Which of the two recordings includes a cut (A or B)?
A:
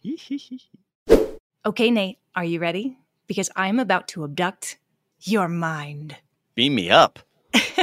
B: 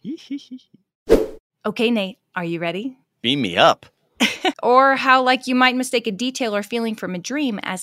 B